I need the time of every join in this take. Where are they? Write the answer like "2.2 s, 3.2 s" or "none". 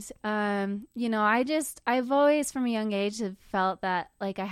none